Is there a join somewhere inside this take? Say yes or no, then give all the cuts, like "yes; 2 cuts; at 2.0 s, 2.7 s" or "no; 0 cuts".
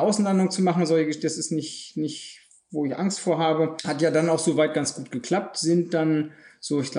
yes; 1 cut; at 3.8 s